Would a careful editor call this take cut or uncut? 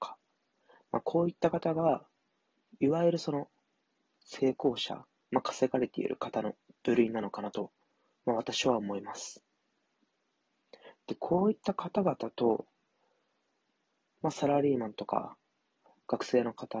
uncut